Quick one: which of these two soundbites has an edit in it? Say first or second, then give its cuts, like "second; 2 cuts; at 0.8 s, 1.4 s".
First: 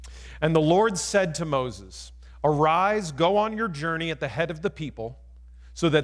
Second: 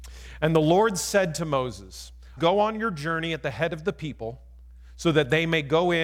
second; 1 cut; at 2.4 s